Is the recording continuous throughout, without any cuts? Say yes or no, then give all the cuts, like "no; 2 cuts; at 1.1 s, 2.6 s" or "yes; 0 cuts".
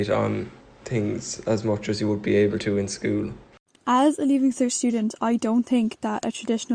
yes; 0 cuts